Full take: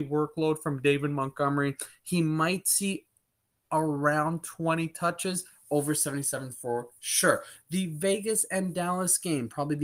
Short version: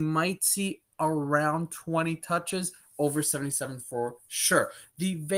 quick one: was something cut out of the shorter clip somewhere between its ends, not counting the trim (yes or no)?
yes